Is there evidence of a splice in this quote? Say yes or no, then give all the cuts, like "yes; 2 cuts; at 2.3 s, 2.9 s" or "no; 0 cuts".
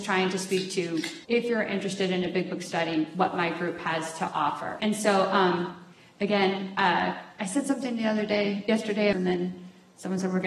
yes; 3 cuts; at 1.2 s, 4.8 s, 9.1 s